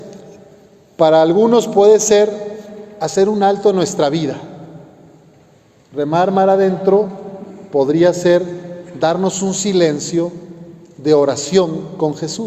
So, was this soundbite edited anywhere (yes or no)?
no